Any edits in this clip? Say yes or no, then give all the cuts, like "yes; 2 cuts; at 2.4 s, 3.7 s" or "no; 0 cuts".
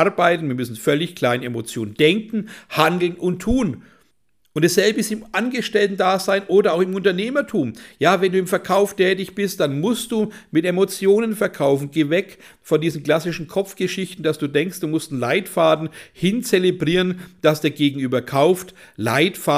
no; 0 cuts